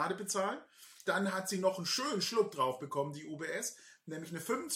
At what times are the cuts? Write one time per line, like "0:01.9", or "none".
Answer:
0:01.1